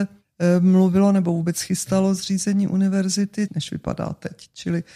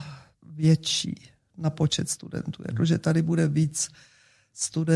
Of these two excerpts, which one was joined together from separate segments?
first; 1 cut; at 3.5 s

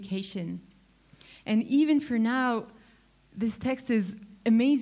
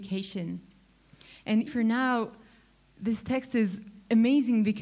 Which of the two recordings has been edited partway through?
second; 1 cut; at 1.7 s

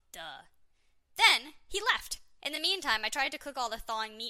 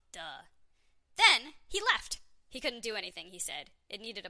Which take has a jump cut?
first; 1 cut; at 2.4 s

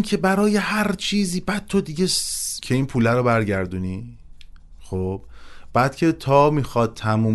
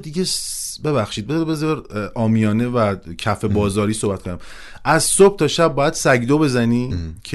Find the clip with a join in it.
first; 1 cut; at 2.6 s

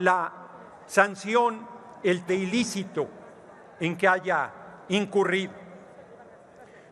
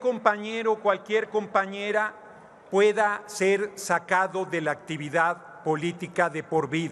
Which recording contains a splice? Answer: first; 1 cut; at 2.3 s

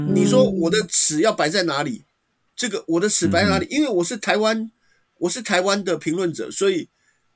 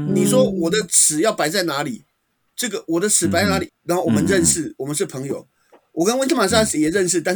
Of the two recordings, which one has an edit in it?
second; 1 cut; at 3.7 s

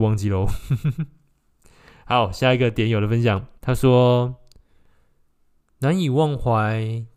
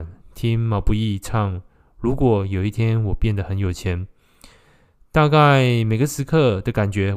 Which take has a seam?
first; 1 cut; at 3.6 s

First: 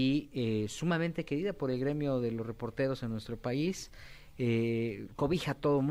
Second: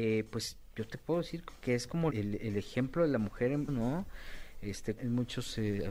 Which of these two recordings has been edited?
second; 3 cuts; at 2.1 s, 3.7 s, 5.0 s

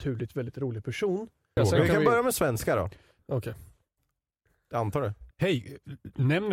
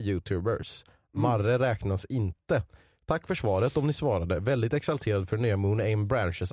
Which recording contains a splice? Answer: first; 3 cuts; at 1.6 s, 3.2 s, 5.3 s

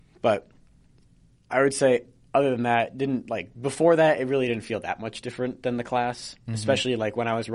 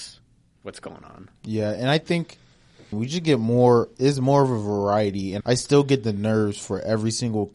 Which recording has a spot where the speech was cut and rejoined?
second; 2 cuts; at 2.9 s, 5.4 s

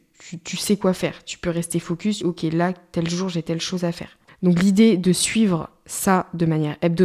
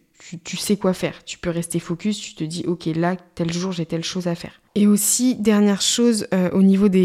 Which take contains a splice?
first; 2 cuts; at 2.2 s, 4.3 s

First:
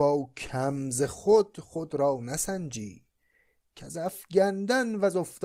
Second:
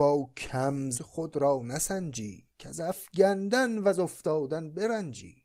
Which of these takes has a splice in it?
second; 2 cuts; at 0.9 s, 2.5 s

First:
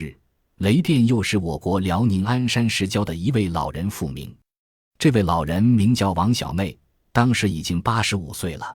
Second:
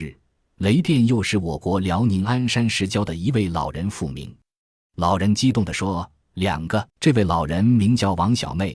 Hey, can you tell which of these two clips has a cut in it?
second; 2 cuts; at 4.8 s, 6.9 s

